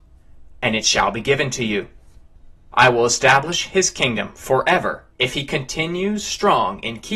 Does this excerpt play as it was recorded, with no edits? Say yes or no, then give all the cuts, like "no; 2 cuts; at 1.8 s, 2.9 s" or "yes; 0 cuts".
no; 2 cuts; at 2.7 s, 5.1 s